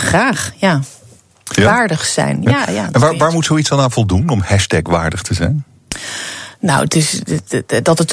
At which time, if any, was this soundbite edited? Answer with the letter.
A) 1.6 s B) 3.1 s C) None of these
A